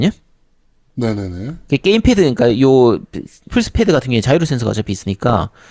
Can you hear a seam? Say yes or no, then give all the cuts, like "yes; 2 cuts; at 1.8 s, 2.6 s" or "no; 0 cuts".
yes; 1 cut; at 3.5 s